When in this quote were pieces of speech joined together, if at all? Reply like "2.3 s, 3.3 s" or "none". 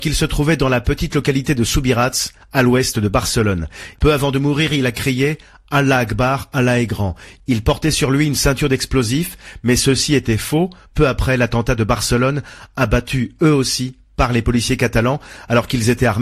4.0 s, 10.9 s